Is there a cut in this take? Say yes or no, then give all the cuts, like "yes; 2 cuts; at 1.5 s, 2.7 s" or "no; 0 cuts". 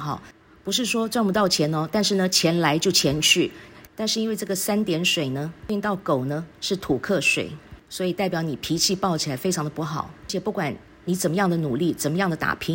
yes; 1 cut; at 3.9 s